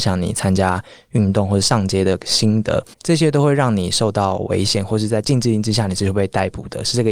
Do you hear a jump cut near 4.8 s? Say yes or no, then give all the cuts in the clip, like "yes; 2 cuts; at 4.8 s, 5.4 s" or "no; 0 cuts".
no; 1 cut; at 2.9 s